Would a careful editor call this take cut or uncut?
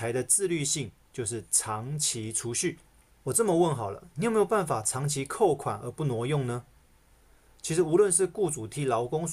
uncut